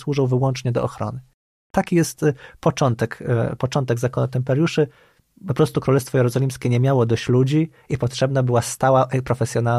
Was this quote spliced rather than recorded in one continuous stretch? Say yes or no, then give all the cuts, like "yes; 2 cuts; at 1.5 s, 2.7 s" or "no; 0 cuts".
no; 0 cuts